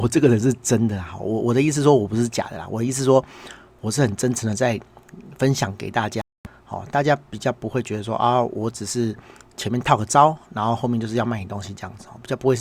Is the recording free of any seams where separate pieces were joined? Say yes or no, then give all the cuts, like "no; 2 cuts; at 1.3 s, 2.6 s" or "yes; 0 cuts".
yes; 0 cuts